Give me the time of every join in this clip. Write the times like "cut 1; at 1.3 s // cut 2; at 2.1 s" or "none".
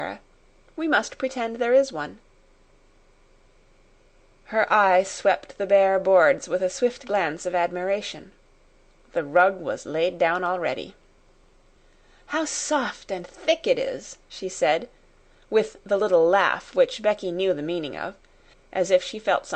cut 1; at 18.5 s